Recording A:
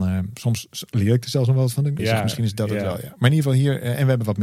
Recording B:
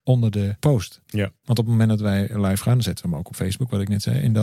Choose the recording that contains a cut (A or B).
A